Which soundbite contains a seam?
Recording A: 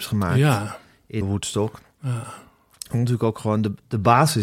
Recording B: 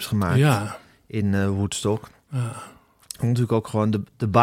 A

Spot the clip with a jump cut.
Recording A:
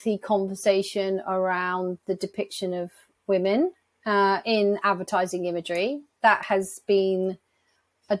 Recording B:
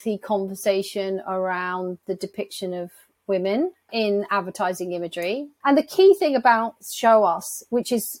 B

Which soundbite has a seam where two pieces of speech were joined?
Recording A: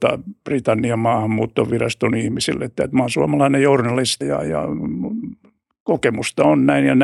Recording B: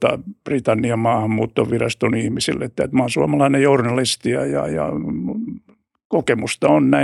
A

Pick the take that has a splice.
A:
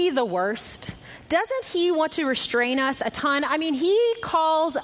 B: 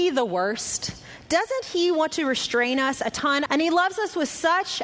B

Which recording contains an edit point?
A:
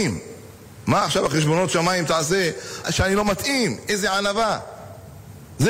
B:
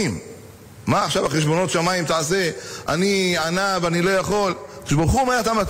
A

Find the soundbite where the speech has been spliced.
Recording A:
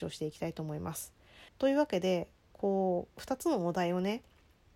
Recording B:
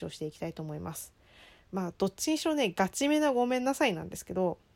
A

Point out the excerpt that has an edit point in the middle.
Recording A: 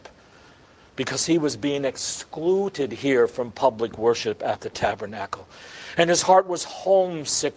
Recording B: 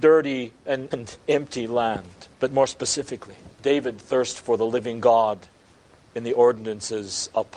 B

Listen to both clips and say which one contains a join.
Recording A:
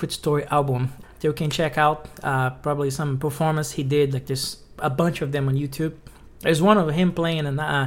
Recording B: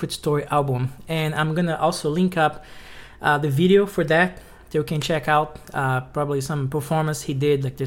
A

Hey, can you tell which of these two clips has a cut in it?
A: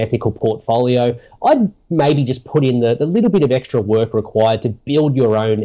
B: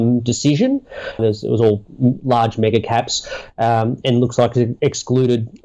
B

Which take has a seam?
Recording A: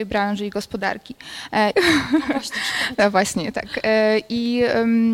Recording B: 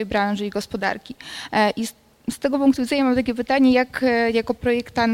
A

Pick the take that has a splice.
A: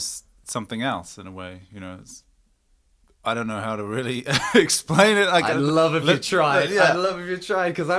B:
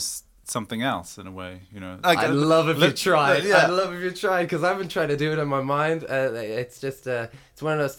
B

